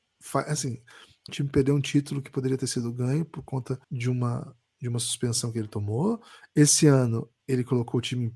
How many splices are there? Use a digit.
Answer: 2